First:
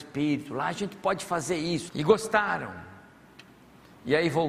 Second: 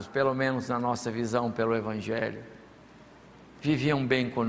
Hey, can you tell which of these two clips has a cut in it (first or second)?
first